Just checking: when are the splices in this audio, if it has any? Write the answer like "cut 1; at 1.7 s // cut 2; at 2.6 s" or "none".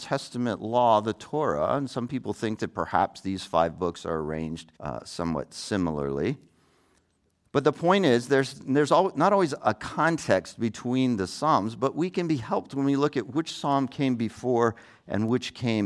cut 1; at 4.8 s